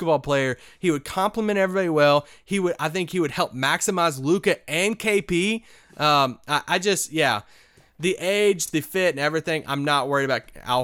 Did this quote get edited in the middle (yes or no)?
no